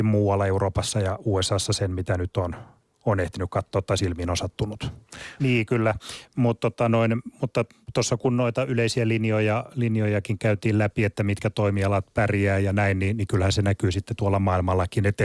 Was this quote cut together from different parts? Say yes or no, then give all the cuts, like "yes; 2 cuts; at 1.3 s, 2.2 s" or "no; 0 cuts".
yes; 1 cut; at 5.4 s